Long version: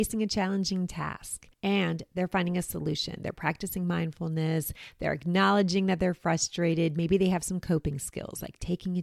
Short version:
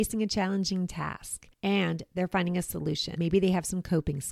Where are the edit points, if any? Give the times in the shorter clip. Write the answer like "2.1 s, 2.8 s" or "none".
3.2 s